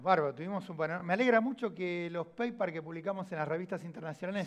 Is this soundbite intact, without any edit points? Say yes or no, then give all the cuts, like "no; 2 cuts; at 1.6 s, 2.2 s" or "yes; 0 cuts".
yes; 0 cuts